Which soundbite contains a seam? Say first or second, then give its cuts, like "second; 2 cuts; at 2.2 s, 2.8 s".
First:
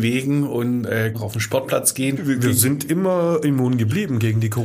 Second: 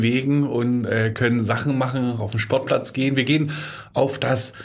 first; 2 cuts; at 1.1 s, 2.2 s